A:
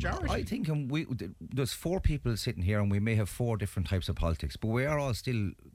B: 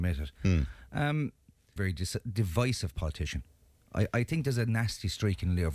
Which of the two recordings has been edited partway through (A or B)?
B